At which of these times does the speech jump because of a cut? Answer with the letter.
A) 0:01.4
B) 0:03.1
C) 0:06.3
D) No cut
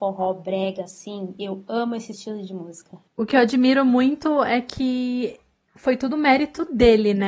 B